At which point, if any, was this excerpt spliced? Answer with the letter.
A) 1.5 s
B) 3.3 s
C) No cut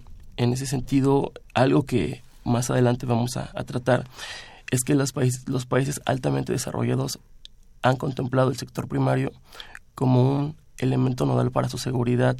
A